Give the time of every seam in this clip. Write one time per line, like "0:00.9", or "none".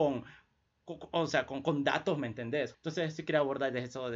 0:02.7